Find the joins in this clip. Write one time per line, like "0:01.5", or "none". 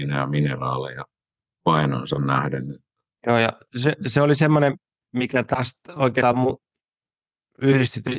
0:03.2